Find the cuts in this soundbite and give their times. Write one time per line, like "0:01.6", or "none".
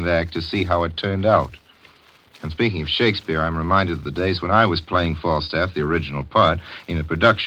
none